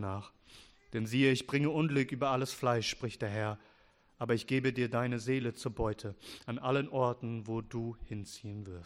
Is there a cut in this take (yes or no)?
no